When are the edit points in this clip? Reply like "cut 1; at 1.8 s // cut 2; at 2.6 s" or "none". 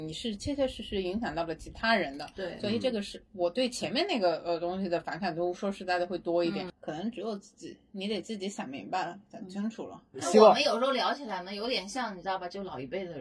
cut 1; at 6.7 s